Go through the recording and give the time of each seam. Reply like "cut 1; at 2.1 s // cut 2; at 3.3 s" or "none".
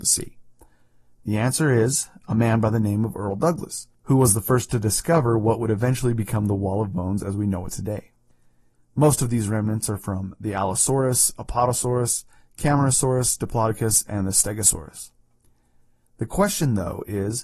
cut 1; at 8.7 s